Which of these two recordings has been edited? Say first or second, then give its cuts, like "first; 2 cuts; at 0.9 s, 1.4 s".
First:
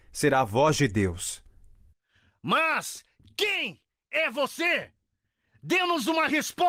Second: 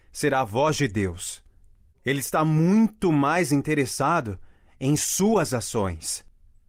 second; 1 cut; at 1.9 s